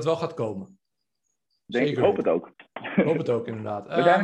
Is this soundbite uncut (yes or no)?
yes